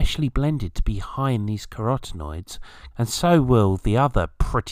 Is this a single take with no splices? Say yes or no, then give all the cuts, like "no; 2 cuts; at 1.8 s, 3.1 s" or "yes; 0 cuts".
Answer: no; 1 cut; at 2.9 s